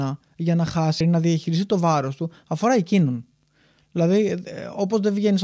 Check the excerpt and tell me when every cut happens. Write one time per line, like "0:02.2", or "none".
0:01.0